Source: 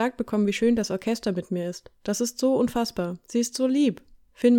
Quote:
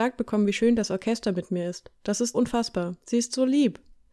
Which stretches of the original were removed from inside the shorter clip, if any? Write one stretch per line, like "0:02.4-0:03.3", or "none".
0:02.3-0:02.6